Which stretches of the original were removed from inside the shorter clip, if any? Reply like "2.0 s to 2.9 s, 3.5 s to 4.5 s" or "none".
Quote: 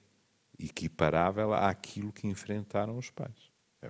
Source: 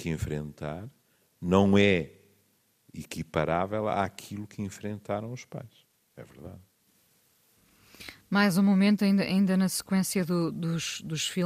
none